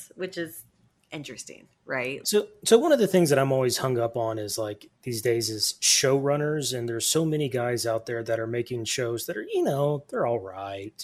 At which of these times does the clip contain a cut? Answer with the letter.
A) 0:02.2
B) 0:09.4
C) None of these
A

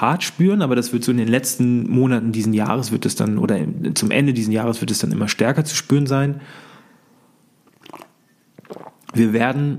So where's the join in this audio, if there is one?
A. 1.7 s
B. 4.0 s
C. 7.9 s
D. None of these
D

